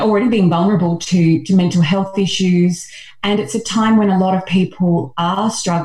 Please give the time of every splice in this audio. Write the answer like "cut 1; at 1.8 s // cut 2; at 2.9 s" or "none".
none